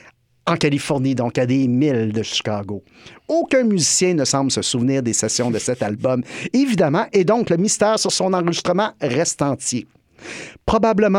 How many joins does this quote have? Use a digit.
0